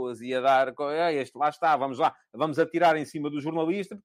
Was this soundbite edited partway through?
no; 0 cuts

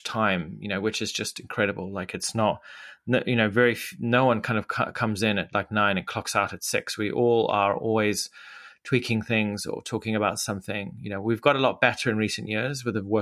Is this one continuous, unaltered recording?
yes; 0 cuts

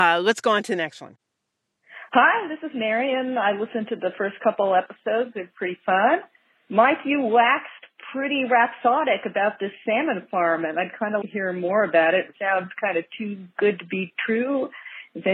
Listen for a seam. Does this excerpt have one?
yes; 2 cuts; at 11.2 s, 12.3 s

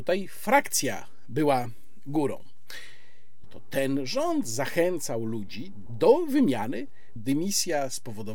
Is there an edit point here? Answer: yes; 3 cuts; at 3.4 s, 5.9 s, 7.2 s

